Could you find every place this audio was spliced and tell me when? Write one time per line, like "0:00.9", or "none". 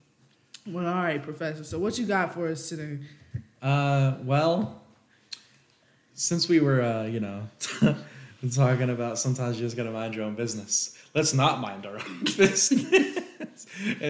none